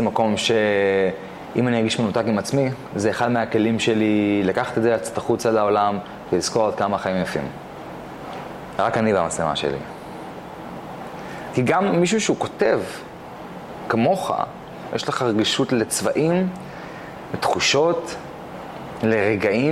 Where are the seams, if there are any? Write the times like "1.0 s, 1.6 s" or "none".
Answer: 11.5 s, 14.9 s